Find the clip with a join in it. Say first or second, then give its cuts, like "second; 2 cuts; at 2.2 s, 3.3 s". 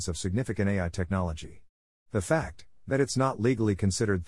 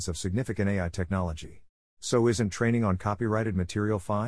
second; 1 cut; at 1.9 s